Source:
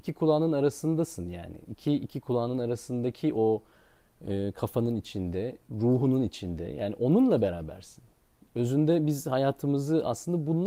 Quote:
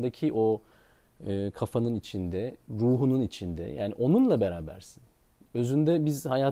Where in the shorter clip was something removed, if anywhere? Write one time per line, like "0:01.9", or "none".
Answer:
none